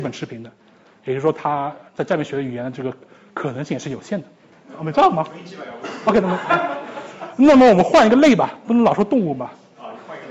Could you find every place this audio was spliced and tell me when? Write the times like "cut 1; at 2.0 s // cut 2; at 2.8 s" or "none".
cut 1; at 4.6 s